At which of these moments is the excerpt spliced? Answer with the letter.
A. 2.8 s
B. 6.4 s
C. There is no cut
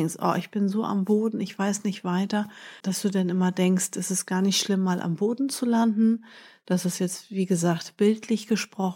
A